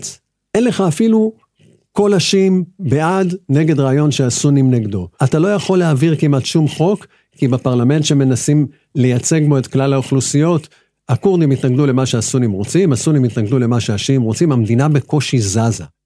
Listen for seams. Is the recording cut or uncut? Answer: cut